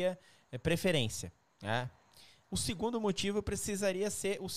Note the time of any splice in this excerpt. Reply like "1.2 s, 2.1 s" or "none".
2.4 s